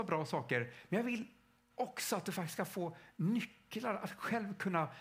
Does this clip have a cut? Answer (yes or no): no